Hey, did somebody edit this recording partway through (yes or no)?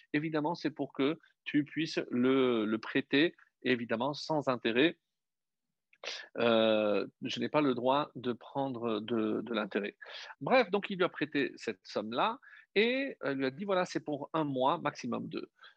yes